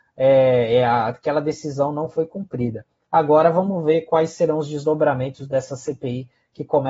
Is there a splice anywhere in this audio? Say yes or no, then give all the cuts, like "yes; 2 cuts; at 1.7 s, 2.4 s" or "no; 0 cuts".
no; 0 cuts